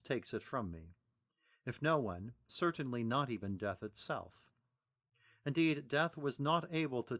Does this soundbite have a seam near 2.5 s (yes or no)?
yes